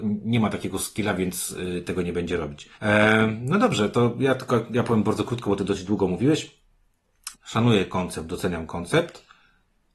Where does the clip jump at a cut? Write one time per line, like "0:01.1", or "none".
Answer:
0:02.7
0:07.3